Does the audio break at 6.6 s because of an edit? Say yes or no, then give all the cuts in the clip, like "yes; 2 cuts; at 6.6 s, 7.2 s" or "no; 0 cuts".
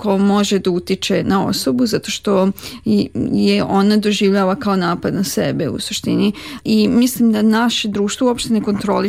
yes; 2 cuts; at 1.2 s, 6.6 s